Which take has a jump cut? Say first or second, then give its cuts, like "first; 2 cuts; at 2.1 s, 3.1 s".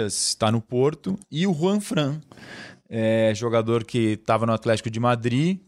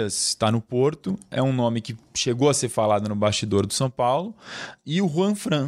first; 1 cut; at 1.2 s